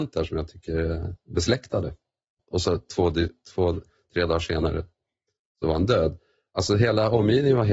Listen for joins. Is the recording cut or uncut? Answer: cut